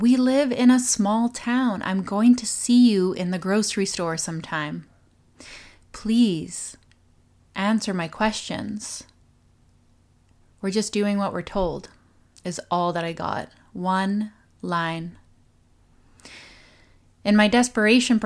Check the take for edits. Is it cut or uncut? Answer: uncut